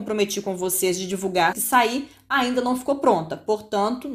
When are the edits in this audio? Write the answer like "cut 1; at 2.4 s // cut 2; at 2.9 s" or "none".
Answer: cut 1; at 1.5 s